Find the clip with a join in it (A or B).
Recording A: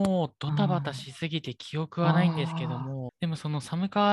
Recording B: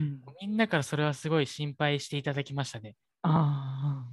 A